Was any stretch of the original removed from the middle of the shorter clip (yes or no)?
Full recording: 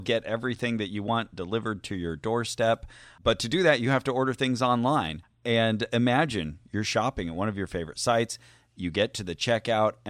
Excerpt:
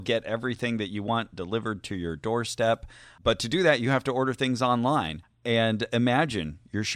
no